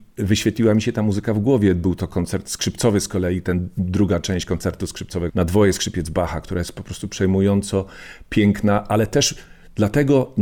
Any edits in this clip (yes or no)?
yes